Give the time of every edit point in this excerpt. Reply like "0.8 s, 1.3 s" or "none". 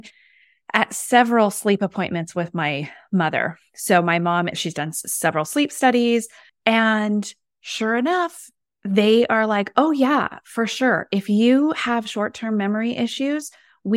6.5 s